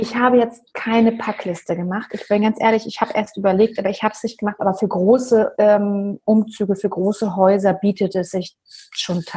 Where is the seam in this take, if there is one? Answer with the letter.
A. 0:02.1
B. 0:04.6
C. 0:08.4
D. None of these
B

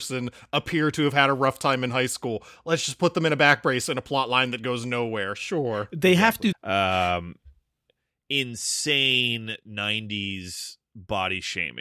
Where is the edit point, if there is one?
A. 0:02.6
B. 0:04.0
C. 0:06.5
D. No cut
C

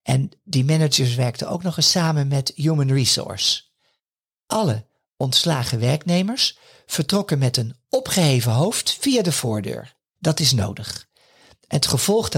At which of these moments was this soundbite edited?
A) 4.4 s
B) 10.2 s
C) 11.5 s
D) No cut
B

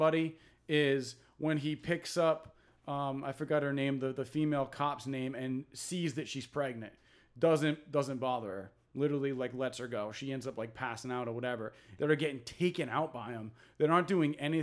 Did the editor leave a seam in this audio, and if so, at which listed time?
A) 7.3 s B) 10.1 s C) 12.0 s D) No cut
C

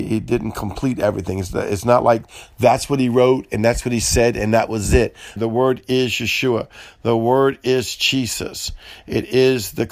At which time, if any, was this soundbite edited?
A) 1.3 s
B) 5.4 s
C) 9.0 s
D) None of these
B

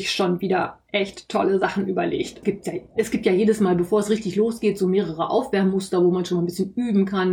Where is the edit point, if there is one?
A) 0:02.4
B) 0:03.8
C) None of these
A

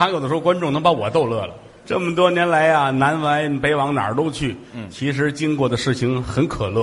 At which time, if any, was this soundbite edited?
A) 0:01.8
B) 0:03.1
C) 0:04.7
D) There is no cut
A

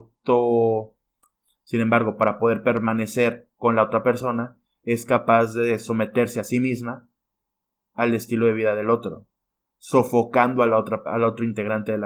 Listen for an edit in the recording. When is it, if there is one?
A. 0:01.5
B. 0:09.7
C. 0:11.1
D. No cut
A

